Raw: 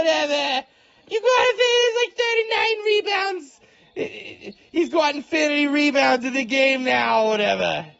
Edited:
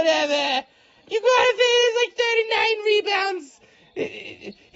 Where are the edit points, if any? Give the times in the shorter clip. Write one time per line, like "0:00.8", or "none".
none